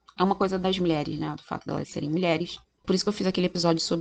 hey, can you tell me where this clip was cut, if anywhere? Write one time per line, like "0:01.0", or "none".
0:02.8